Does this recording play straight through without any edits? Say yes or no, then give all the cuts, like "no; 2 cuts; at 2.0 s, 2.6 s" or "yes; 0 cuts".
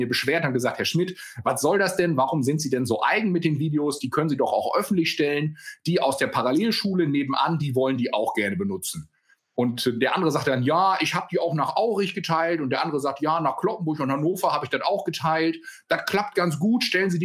yes; 0 cuts